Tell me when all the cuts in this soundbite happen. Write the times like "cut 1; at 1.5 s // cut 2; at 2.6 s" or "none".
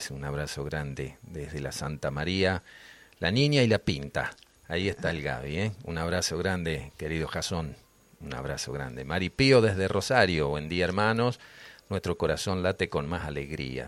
none

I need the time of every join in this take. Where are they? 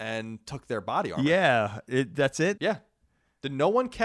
cut 1; at 2.6 s

